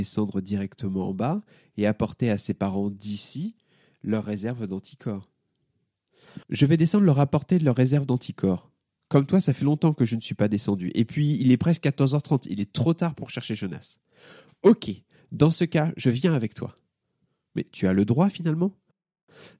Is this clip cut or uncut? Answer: cut